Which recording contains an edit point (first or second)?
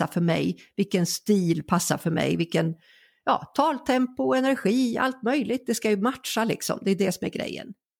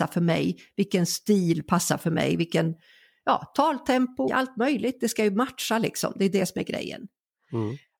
second